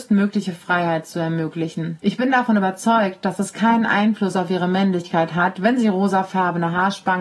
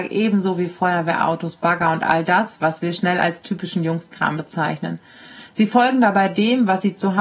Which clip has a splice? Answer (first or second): first